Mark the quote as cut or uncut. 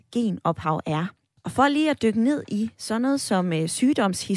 cut